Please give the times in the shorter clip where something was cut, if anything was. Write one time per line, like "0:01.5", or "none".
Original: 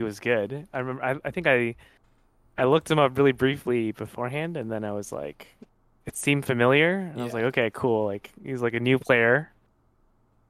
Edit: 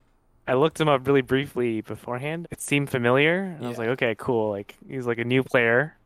0:02.4